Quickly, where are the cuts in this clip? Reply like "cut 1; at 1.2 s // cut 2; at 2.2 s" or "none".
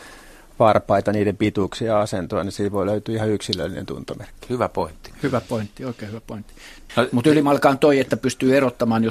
cut 1; at 6.9 s